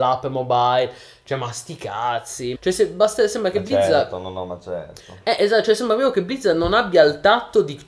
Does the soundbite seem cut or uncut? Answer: cut